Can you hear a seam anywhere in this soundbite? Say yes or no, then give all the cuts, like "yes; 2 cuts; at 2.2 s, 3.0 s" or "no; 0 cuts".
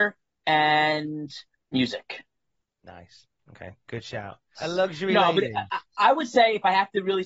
yes; 1 cut; at 4.6 s